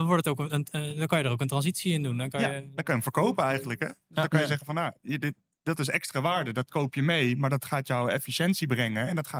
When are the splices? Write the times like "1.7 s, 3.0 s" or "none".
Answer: none